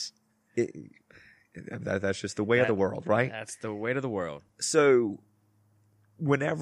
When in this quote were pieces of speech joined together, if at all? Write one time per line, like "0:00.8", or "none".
none